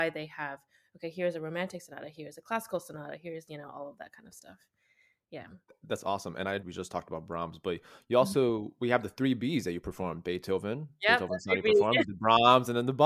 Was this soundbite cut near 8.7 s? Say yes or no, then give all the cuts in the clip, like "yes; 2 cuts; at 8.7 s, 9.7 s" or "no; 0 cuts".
no; 1 cut; at 6.6 s